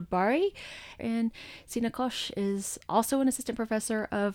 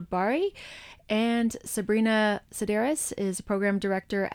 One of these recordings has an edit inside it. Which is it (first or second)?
first